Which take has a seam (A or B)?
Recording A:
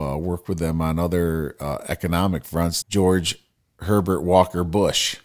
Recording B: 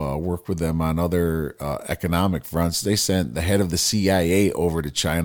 A